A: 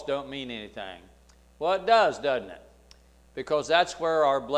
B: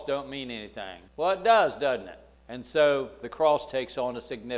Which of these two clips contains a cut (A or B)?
B